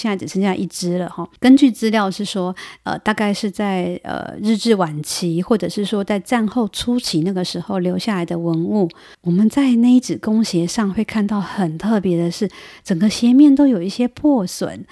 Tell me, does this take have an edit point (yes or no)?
yes